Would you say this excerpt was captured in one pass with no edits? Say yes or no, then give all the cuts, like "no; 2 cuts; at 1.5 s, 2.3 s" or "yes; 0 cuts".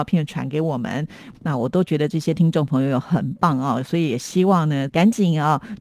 no; 2 cuts; at 1.3 s, 4.9 s